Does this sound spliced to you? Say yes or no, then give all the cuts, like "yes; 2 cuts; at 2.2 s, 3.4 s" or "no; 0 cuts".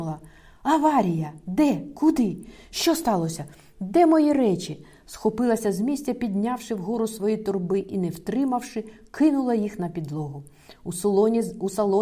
no; 0 cuts